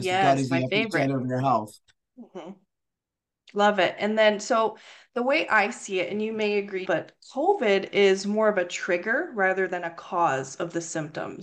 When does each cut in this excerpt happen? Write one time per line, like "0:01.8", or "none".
0:06.8